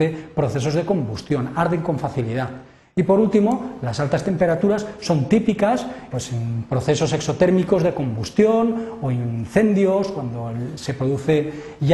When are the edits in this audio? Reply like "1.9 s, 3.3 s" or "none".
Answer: 6.1 s, 10.8 s